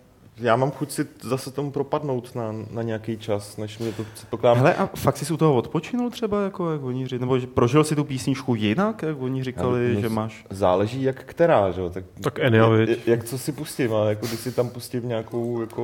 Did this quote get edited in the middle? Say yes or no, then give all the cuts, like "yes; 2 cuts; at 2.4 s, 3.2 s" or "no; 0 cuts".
no; 0 cuts